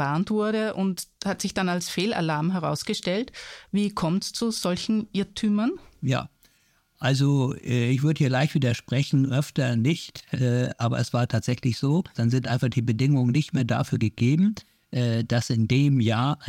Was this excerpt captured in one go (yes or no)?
no